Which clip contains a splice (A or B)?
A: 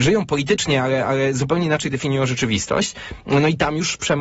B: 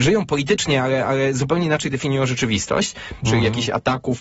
B